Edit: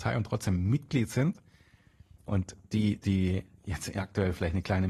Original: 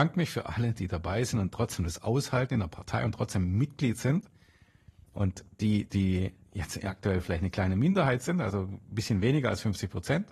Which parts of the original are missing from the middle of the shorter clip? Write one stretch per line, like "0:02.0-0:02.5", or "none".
none